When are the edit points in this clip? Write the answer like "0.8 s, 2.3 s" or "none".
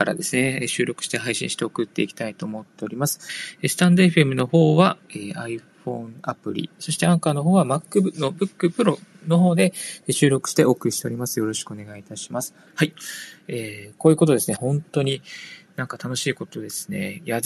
14.6 s